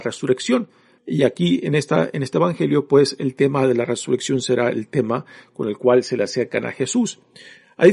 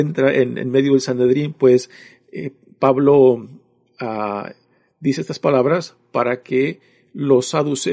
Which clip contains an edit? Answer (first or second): first